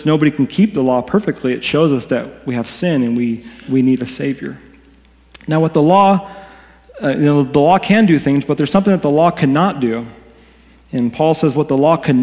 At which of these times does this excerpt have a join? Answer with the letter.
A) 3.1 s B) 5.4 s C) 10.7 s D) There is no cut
D